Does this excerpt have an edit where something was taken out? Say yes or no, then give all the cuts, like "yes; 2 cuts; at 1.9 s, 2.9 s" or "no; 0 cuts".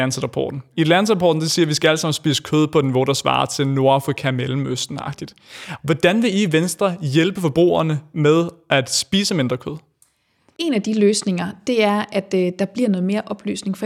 yes; 1 cut; at 5.8 s